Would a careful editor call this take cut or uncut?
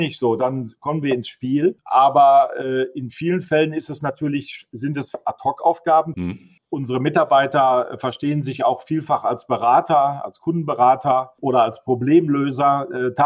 cut